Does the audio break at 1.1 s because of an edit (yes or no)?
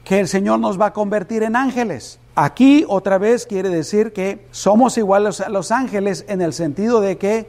no